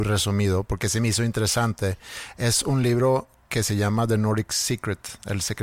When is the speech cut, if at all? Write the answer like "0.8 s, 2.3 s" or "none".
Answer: none